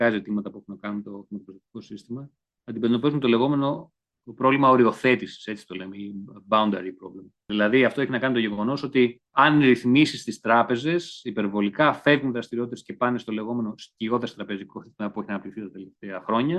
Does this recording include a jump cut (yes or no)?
no